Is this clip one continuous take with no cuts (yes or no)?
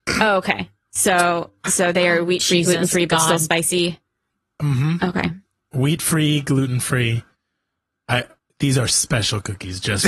yes